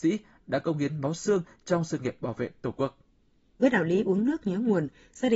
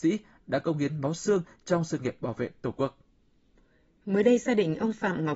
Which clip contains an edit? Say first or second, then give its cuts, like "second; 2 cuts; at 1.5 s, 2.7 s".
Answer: first; 1 cut; at 3.6 s